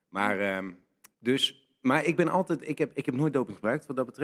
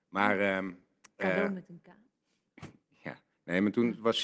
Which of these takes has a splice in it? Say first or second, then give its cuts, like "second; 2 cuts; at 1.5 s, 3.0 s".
first; 1 cut; at 1.1 s